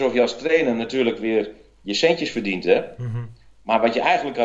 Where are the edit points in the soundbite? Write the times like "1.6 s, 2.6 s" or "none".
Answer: none